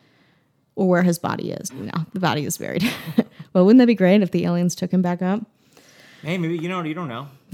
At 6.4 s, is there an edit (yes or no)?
no